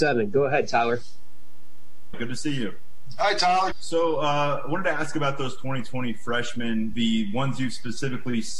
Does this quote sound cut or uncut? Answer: cut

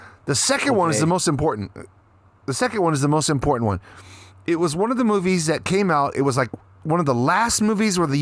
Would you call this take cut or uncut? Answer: uncut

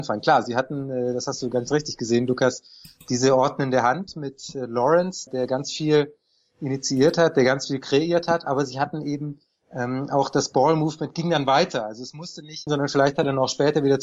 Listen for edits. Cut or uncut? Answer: cut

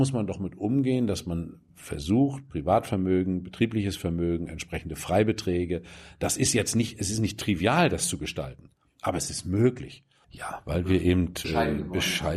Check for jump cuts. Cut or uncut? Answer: cut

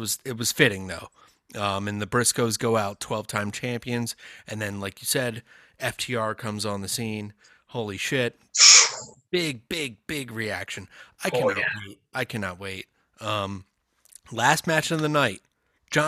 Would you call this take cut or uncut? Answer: uncut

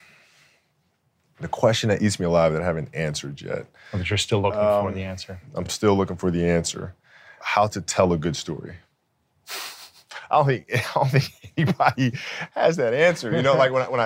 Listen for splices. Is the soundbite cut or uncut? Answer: uncut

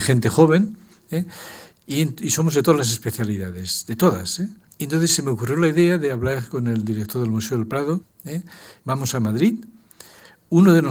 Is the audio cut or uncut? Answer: cut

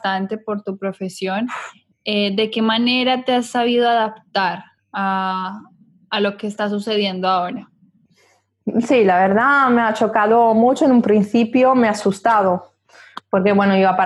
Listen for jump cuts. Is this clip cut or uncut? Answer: uncut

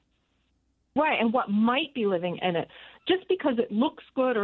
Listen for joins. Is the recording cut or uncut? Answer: cut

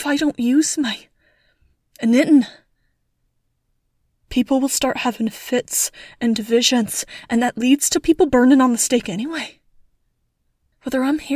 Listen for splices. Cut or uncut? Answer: uncut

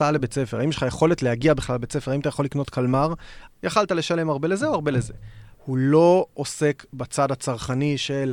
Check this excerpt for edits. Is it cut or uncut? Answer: cut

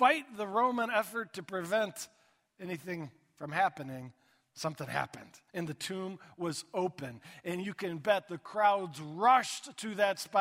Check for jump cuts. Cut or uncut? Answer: cut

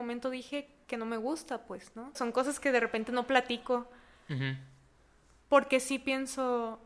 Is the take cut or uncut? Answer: cut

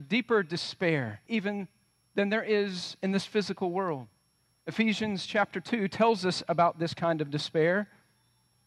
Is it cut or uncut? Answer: cut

